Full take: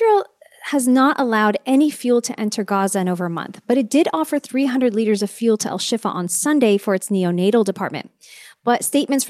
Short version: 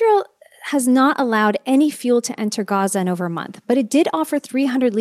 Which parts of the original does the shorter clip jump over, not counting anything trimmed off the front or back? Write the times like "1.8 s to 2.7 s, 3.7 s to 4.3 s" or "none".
none